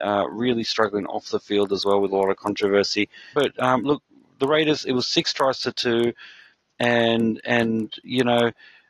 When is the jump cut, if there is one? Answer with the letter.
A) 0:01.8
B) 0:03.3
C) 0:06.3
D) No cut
B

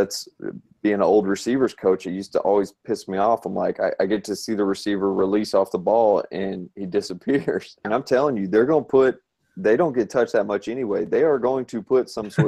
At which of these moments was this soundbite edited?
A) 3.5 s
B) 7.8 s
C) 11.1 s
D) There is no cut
B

